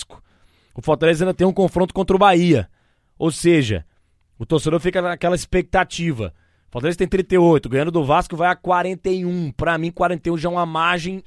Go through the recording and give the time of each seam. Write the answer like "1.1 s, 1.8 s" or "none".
none